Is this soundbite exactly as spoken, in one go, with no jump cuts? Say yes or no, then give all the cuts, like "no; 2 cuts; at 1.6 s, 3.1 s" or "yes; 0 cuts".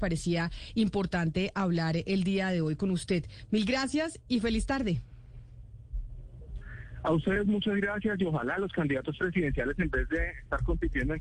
yes; 0 cuts